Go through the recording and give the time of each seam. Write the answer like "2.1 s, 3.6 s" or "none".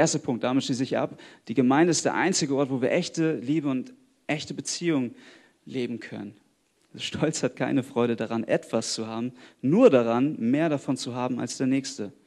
6.8 s